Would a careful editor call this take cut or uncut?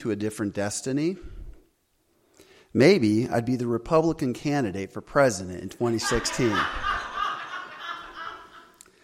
uncut